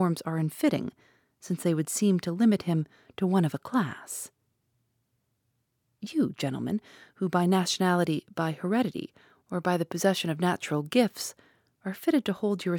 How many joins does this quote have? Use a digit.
0